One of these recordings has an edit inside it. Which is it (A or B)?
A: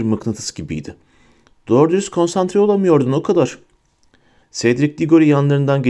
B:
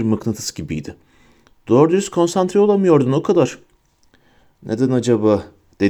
A